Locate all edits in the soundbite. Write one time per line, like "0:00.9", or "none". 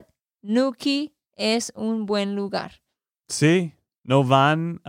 0:04.0